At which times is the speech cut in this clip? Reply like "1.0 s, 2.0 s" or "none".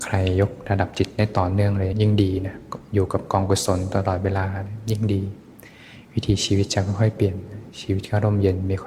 1.9 s